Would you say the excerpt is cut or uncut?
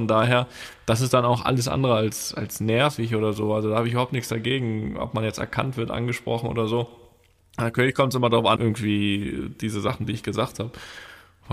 cut